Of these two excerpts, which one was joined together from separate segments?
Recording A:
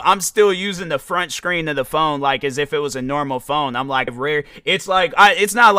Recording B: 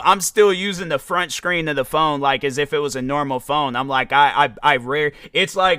A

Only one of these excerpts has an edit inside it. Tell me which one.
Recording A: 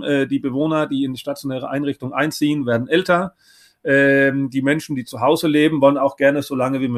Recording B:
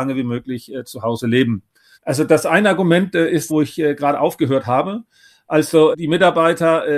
B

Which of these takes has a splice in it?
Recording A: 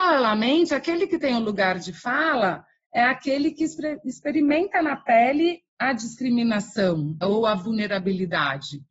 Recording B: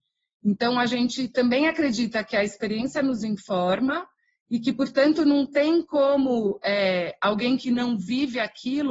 A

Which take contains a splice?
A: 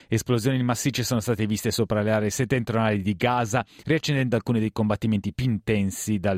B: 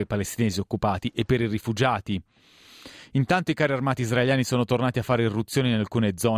A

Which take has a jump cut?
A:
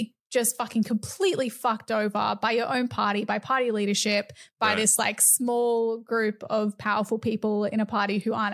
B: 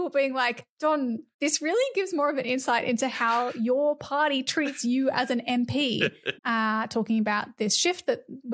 B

